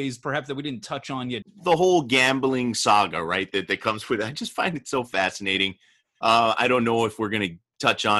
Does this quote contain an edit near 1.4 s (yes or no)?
yes